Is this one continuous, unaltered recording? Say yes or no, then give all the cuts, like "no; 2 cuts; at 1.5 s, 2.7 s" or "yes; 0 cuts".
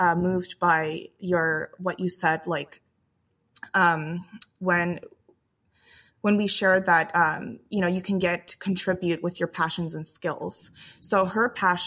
yes; 0 cuts